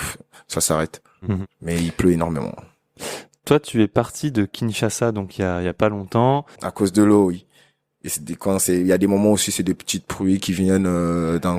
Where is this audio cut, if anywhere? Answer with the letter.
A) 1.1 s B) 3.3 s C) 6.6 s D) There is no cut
C